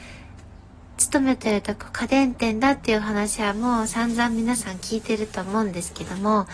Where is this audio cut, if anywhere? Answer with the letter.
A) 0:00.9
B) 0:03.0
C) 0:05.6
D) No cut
A